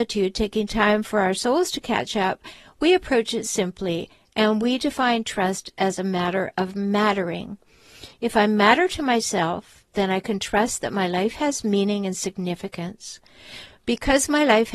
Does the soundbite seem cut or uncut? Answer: uncut